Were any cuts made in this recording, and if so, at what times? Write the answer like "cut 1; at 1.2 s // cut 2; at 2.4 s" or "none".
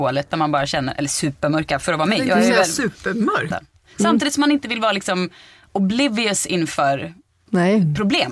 cut 1; at 3.5 s // cut 2; at 7.3 s